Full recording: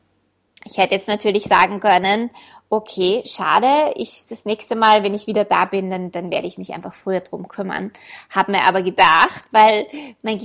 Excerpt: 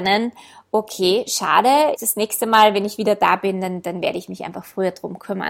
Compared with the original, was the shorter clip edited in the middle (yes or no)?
yes